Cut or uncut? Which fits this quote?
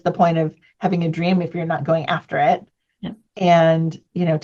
uncut